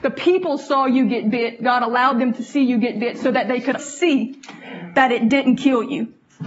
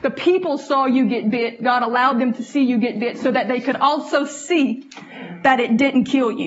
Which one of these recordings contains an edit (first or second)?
first